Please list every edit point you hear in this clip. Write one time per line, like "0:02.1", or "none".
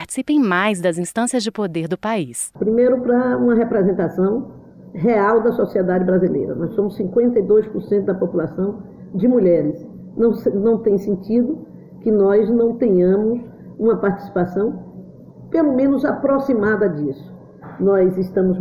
none